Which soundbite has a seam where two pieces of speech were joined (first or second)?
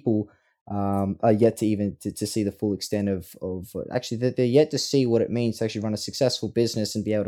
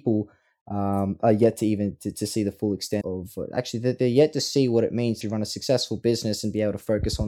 second